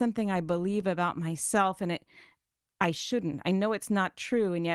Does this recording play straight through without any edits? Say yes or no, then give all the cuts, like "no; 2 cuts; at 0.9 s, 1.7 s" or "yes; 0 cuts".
yes; 0 cuts